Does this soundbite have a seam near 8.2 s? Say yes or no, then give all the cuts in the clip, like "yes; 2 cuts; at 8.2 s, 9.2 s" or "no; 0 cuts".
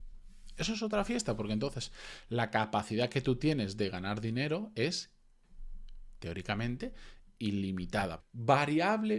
yes; 1 cut; at 8.2 s